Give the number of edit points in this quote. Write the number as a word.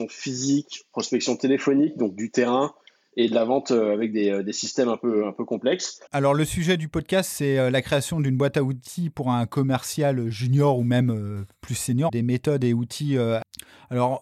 two